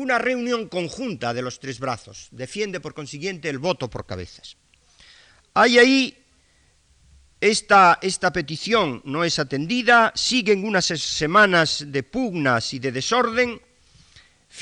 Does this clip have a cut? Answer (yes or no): no